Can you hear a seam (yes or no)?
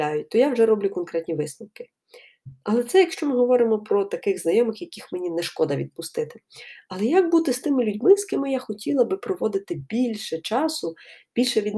no